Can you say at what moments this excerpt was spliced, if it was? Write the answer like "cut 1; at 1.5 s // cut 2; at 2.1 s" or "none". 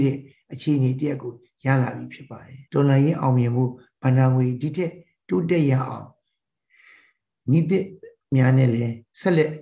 cut 1; at 2.7 s